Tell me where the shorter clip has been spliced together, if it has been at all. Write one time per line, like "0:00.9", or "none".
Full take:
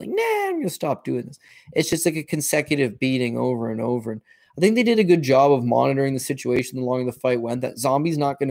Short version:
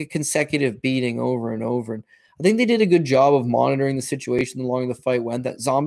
none